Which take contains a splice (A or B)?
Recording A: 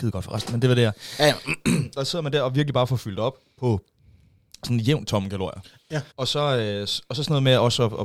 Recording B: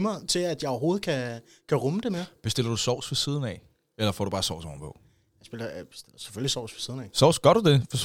A